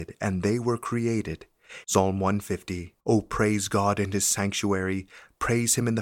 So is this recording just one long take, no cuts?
no; 2 cuts; at 1.8 s, 3.0 s

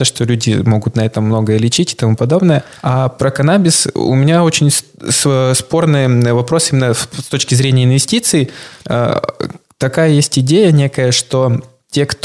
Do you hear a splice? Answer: no; 0 cuts

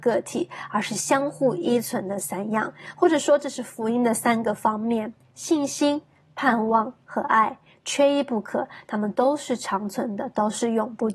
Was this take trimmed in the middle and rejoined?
no; 0 cuts

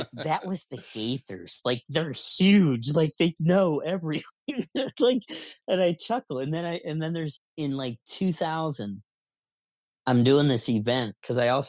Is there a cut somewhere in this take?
yes; 1 cut; at 7.4 s

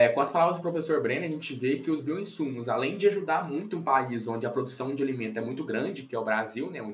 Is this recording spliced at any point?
no; 0 cuts

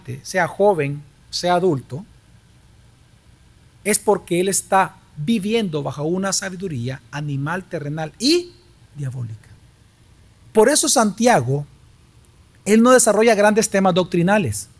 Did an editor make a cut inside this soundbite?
no; 0 cuts

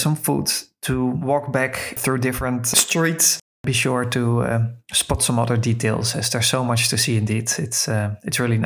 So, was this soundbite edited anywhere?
no; 0 cuts

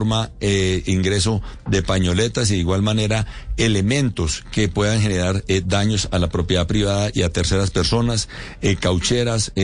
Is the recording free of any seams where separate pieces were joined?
yes; 0 cuts

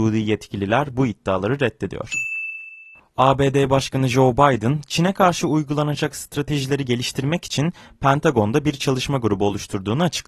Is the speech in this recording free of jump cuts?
yes; 0 cuts

